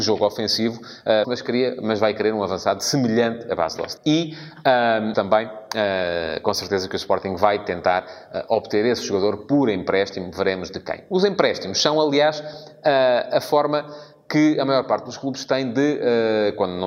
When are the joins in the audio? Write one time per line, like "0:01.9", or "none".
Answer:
0:01.2
0:04.0
0:05.1